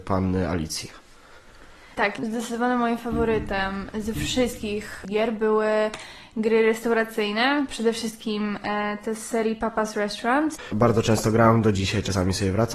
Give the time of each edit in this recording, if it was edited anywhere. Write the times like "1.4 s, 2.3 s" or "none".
10.7 s